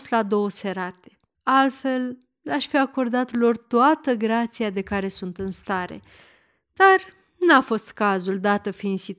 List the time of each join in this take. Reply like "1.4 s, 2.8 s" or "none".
1.3 s